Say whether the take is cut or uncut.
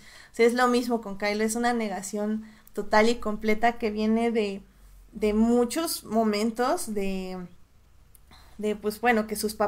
uncut